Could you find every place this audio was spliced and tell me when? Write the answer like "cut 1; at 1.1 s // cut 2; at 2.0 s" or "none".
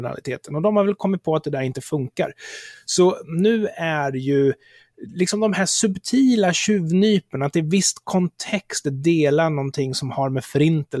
none